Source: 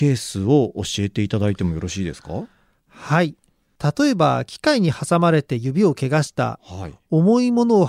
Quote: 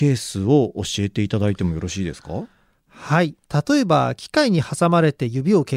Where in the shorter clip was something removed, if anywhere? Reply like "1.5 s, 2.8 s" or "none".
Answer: 3.4 s